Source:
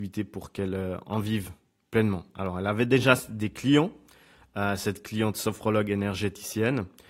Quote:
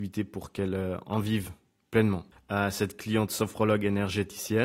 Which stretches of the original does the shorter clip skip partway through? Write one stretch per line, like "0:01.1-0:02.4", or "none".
0:02.3-0:04.4